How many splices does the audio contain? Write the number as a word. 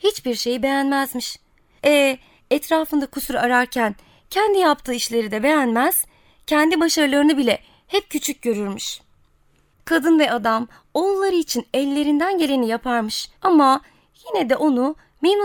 three